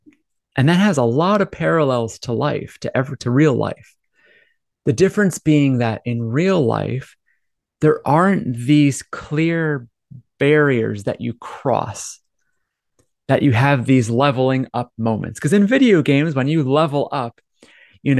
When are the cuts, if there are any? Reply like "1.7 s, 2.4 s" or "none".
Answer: none